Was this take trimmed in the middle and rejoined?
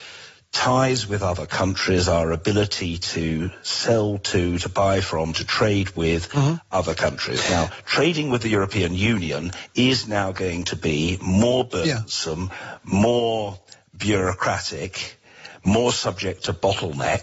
no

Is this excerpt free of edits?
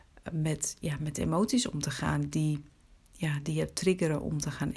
yes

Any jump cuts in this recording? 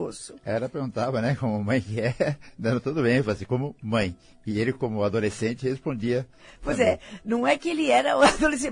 no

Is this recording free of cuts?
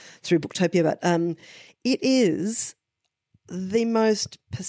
yes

